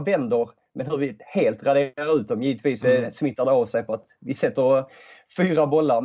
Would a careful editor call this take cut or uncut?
uncut